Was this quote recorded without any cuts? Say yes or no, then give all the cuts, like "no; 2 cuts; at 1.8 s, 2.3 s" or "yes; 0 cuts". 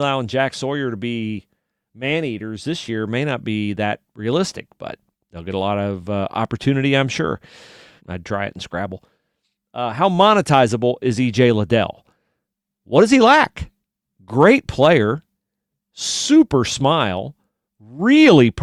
no; 1 cut; at 8.0 s